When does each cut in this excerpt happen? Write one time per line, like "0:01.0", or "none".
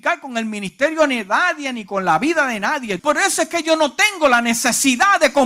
0:03.0